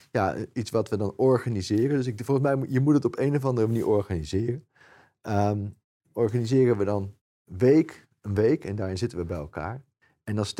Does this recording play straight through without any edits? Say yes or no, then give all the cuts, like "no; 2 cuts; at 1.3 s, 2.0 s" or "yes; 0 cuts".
yes; 0 cuts